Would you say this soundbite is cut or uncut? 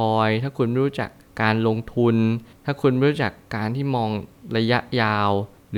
uncut